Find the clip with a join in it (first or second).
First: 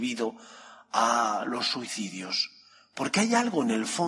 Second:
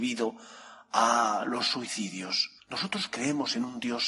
second